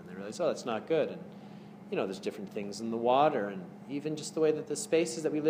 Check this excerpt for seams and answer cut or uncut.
uncut